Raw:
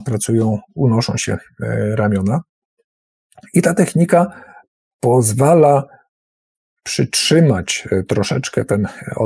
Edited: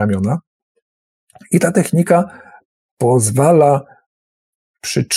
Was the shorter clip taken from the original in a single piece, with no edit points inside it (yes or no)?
yes